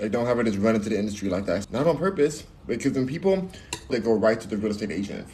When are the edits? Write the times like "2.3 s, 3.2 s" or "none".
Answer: 1.6 s, 3.9 s